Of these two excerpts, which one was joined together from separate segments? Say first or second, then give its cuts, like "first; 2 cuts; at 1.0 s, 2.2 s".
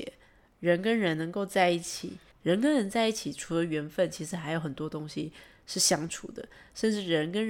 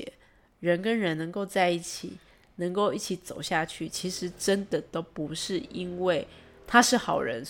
first; 1 cut; at 2.3 s